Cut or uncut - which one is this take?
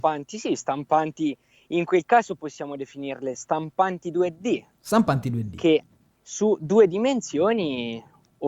uncut